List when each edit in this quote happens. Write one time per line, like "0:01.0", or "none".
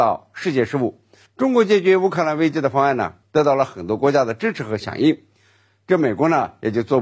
0:01.3
0:03.2

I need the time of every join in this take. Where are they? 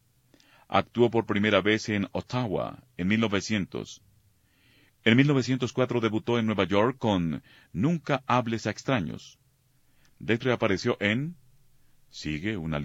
0:10.4

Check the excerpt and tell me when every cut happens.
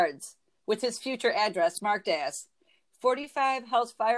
none

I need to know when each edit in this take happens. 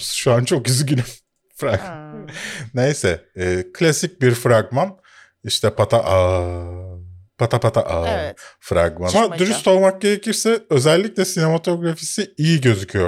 0:05.8
0:09.1

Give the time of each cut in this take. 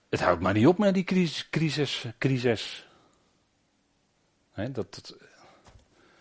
none

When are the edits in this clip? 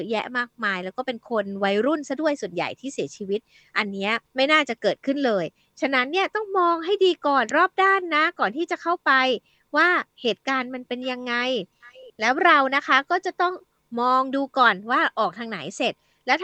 0:04.3

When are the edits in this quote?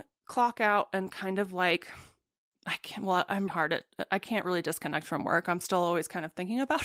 0:03.5

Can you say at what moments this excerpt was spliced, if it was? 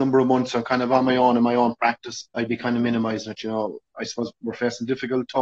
0:02.3

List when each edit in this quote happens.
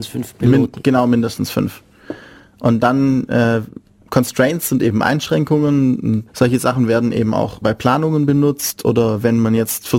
0:06.3
0:07.6

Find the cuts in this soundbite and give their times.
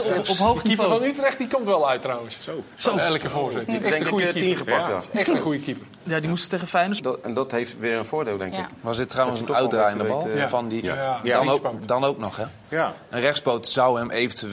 0:07.0

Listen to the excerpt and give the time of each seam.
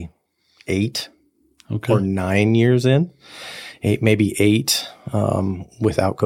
none

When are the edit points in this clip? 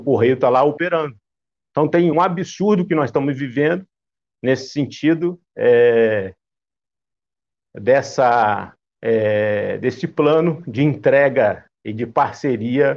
0:02.1

